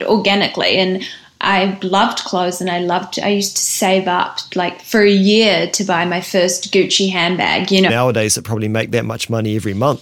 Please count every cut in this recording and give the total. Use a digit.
1